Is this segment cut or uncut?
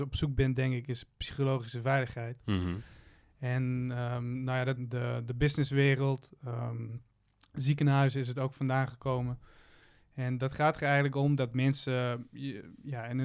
cut